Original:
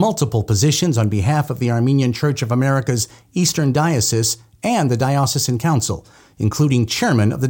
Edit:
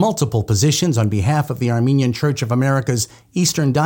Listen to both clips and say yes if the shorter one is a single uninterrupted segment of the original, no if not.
yes